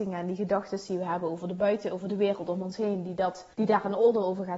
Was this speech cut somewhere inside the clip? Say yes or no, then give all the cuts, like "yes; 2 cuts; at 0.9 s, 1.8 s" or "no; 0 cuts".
yes; 1 cut; at 3.5 s